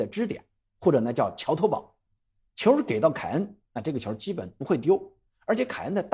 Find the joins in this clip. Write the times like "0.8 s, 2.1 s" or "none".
none

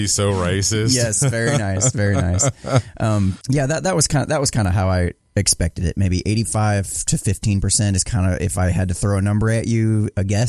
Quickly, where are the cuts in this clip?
3.4 s

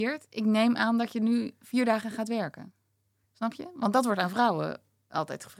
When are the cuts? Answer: none

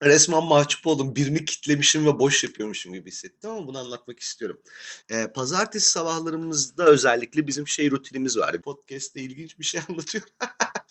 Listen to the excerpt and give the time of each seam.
5.0 s, 8.6 s

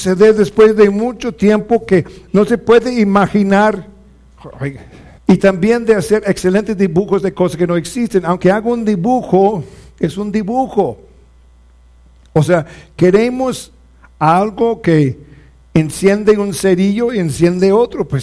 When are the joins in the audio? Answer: 5.2 s

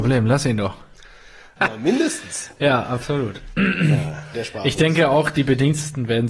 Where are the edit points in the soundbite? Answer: 1.6 s, 4.3 s

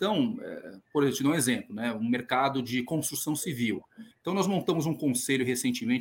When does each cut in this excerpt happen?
4.1 s

